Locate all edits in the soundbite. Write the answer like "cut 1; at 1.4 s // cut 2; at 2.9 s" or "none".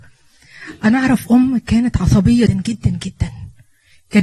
cut 1; at 2.5 s